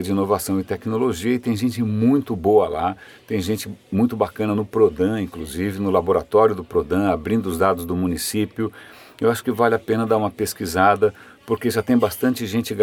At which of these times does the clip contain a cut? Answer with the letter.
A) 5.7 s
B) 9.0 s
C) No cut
C